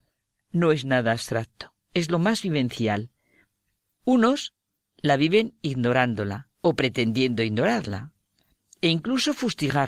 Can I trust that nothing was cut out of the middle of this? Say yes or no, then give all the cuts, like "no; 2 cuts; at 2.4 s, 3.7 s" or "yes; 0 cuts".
no; 2 cuts; at 4.0 s, 6.5 s